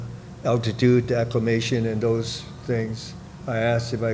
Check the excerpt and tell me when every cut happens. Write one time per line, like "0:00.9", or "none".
none